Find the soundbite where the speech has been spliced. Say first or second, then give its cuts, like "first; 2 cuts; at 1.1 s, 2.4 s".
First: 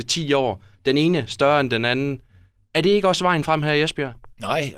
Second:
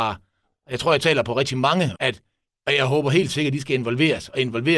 second; 1 cut; at 2.0 s